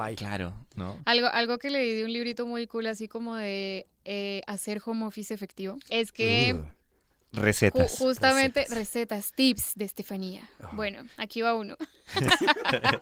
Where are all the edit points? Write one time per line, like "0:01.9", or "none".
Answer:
0:05.9